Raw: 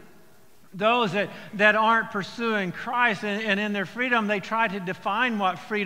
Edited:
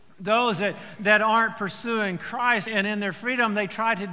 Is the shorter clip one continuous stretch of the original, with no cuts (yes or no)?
no